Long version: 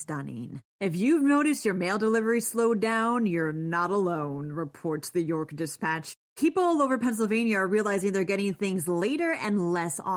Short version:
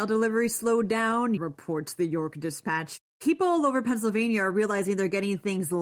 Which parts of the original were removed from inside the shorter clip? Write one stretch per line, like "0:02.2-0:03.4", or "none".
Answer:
0:03.3-0:04.5